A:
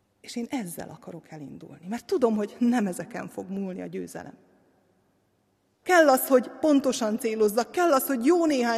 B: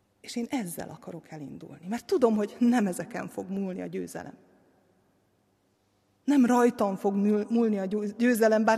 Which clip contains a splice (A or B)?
A